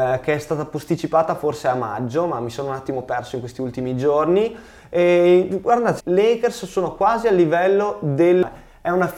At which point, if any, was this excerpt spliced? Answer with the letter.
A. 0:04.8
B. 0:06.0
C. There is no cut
B